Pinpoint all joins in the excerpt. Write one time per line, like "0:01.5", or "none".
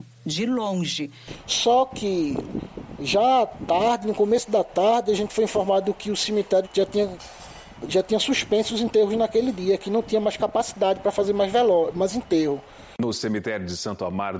0:06.6